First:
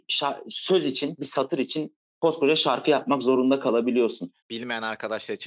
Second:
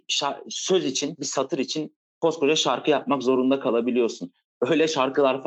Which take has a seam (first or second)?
first